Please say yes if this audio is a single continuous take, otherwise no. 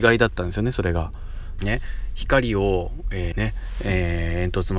no